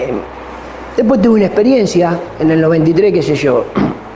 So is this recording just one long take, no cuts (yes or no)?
yes